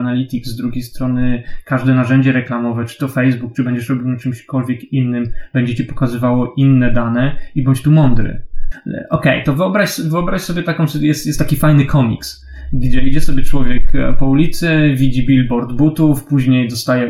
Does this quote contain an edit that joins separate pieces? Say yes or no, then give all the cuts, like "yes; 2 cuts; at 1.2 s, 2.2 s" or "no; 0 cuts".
yes; 1 cut; at 8.7 s